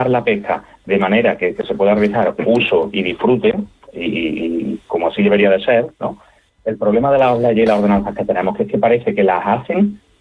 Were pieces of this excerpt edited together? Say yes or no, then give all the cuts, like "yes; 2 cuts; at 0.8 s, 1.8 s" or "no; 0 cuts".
yes; 1 cut; at 6.5 s